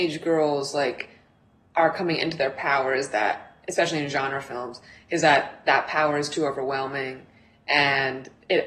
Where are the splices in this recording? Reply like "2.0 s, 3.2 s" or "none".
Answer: none